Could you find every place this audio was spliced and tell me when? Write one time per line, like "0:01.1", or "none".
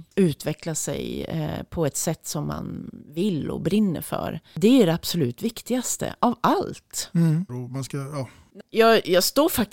0:07.5
0:08.6